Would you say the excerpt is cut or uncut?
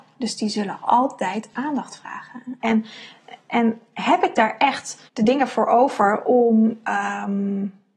cut